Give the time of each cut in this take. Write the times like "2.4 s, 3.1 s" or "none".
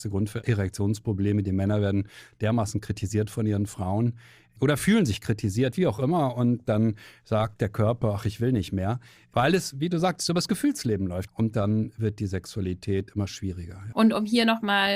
11.3 s, 13.9 s